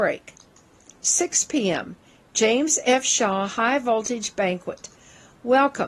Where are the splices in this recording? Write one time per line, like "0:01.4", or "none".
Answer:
none